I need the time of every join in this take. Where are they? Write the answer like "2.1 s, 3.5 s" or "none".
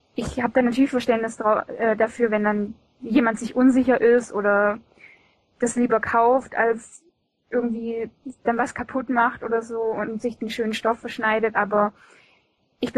none

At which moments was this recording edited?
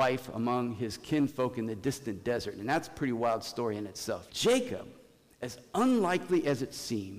4.3 s

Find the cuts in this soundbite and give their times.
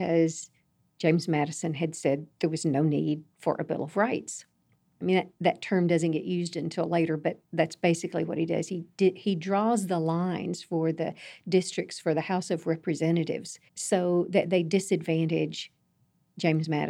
5.0 s, 13.7 s

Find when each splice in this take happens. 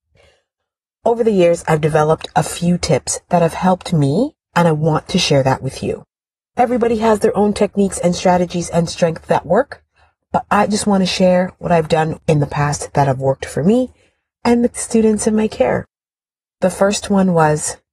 none

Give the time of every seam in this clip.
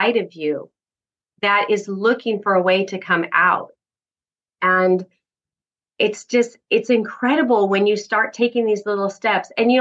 none

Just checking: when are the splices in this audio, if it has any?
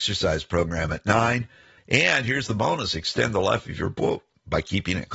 1.8 s

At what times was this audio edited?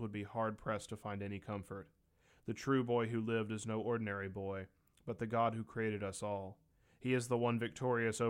none

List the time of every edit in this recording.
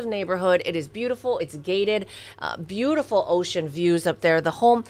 none

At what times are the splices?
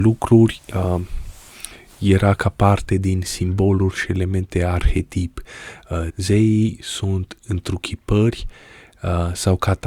6.1 s

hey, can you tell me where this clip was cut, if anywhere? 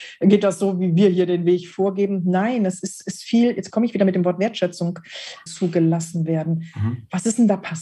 5.5 s

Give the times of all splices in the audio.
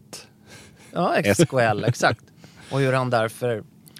1.4 s

